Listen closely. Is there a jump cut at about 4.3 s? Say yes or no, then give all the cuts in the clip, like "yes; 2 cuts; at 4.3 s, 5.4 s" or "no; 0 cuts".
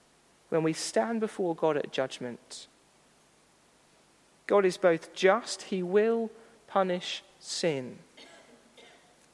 yes; 1 cut; at 4.3 s